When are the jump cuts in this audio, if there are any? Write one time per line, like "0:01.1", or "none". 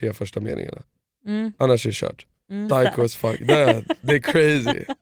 0:02.7